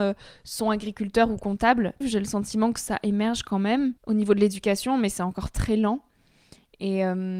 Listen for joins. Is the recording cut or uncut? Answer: cut